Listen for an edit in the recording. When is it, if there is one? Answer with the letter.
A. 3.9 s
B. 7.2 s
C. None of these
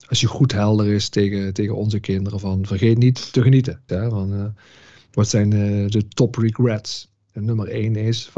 A